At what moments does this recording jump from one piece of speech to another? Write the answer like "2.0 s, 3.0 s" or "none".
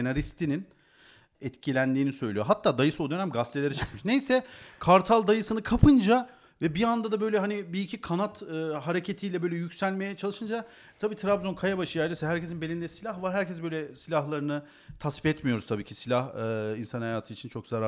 1.3 s